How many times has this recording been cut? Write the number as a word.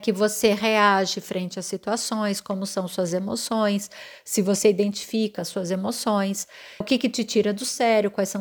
one